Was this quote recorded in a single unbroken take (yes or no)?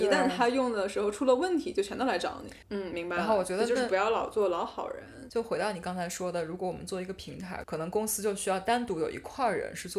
no